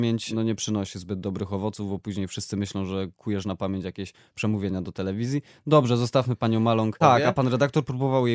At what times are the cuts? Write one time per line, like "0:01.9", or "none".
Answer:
0:07.0

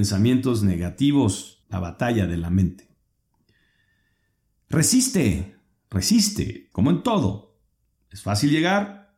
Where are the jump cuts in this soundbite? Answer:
0:01.6
0:06.7

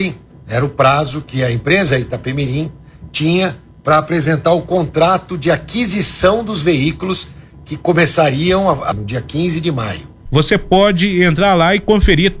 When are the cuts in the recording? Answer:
0:08.9
0:10.3

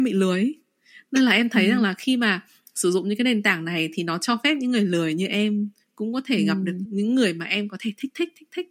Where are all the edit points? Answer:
0:06.9

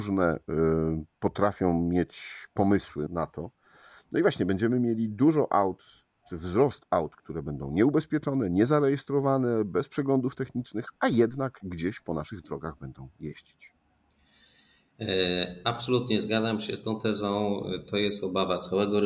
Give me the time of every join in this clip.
0:03.1

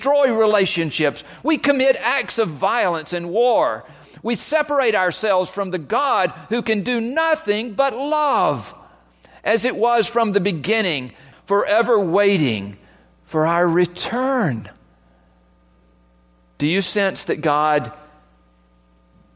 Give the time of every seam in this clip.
0:11.3

